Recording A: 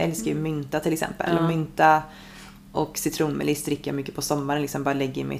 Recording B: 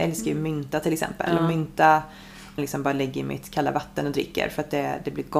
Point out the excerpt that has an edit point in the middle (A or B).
B